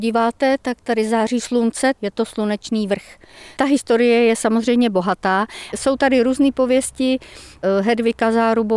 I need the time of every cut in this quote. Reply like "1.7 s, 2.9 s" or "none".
2.0 s